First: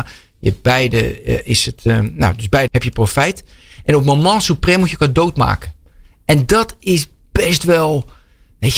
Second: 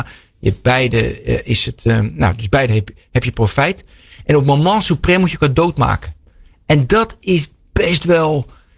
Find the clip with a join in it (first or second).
first